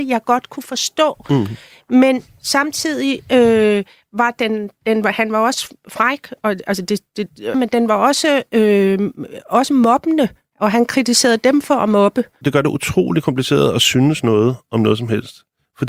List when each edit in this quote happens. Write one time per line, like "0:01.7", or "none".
0:07.5
0:12.4